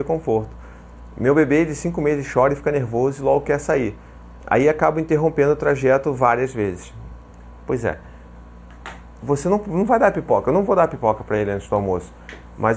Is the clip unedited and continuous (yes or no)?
no